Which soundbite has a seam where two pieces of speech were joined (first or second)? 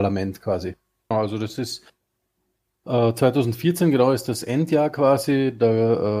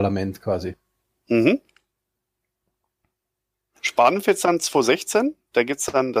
first